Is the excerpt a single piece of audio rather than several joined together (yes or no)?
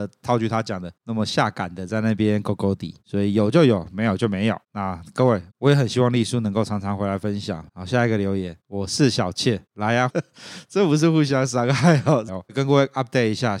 no